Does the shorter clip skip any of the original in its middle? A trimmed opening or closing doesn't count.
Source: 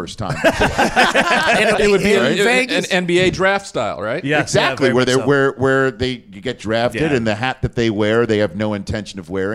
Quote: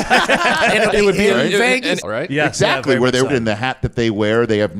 yes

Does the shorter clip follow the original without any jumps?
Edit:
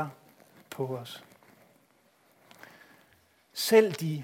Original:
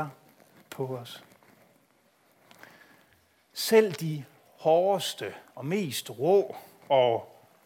yes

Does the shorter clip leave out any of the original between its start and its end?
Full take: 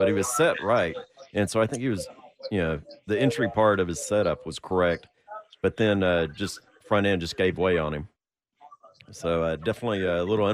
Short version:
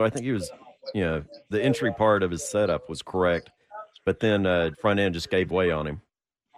yes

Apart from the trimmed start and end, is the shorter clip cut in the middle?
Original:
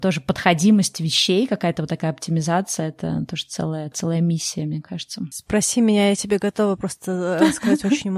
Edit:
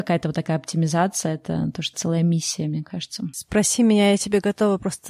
yes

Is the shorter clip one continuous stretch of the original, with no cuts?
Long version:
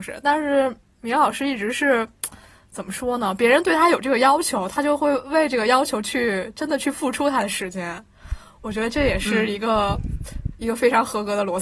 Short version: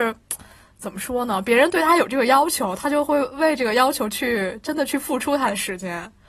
yes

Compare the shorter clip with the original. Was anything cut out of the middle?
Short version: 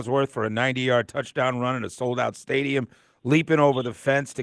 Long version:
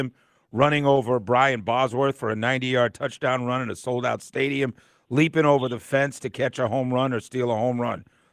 no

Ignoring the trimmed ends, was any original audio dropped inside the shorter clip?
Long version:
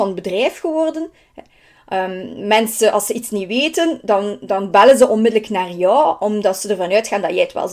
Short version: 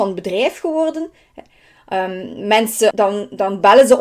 yes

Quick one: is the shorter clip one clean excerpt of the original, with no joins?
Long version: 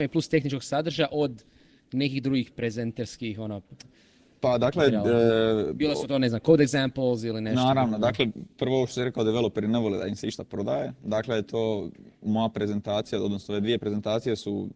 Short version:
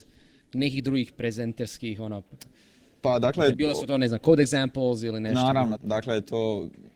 no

